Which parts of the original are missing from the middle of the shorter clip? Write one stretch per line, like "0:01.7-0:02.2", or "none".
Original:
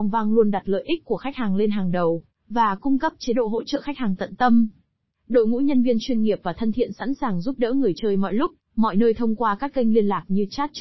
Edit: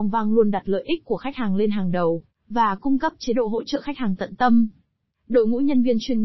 none